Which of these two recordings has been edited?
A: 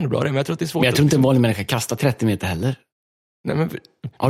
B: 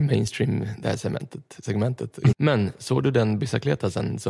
B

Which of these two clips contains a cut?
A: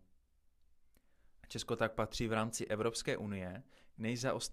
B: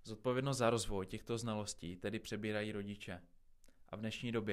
A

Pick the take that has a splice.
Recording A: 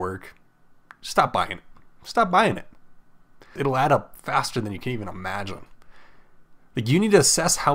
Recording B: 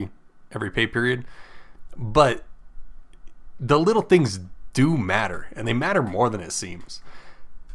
A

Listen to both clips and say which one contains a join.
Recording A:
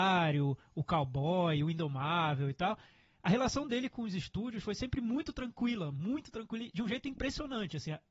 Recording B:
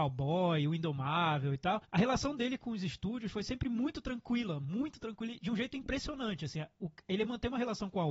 B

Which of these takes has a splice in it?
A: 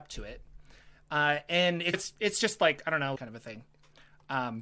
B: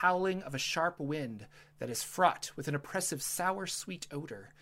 A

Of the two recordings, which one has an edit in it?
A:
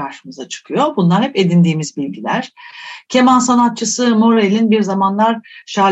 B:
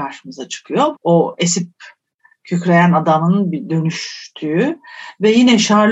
B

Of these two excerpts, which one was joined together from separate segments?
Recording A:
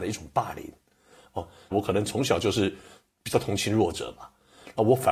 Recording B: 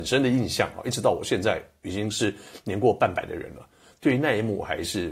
A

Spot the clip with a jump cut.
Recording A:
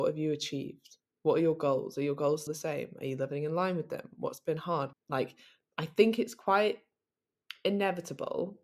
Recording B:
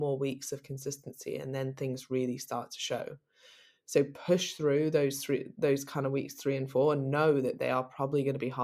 A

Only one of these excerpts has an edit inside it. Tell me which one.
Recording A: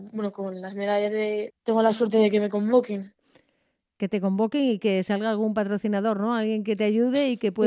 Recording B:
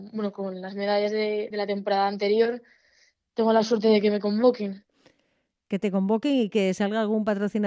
A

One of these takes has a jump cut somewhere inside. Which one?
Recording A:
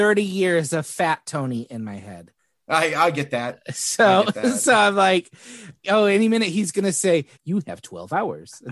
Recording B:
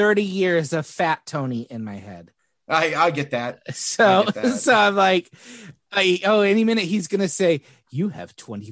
A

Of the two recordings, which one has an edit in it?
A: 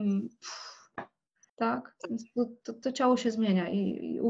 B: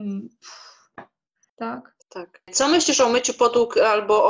B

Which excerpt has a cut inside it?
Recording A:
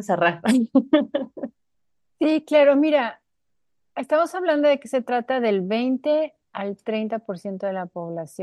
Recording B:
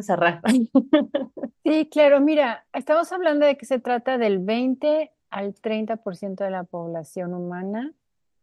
B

